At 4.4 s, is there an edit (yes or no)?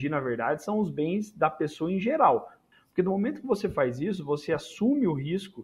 no